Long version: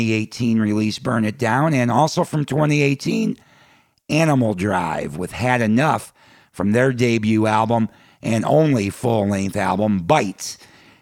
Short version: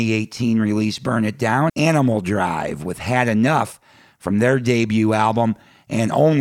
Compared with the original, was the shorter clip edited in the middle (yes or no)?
yes